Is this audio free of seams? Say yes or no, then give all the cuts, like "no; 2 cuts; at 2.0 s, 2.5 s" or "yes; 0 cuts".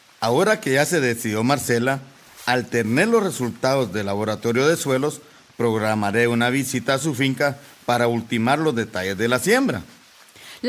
yes; 0 cuts